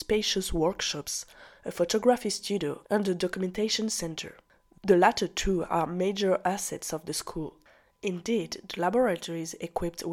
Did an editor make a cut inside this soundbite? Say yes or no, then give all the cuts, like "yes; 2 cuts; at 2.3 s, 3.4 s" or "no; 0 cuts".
yes; 1 cut; at 2.8 s